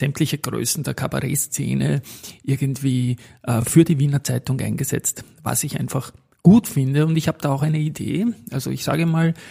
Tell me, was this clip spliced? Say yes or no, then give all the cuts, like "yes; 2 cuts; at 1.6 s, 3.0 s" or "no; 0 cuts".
no; 0 cuts